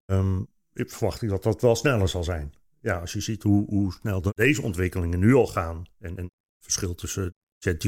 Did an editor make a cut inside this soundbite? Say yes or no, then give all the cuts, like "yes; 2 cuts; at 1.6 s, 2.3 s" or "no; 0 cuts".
no; 0 cuts